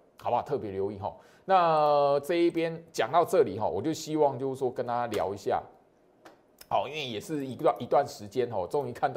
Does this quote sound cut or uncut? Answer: uncut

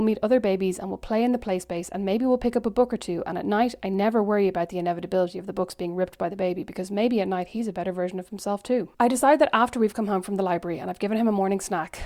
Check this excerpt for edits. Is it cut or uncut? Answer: cut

